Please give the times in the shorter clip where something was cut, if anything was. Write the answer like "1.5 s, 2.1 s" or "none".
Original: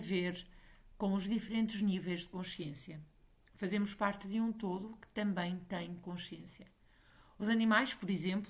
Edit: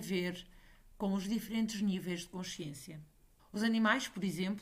3.4 s